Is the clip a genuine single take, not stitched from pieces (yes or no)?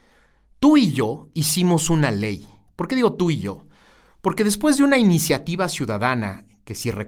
yes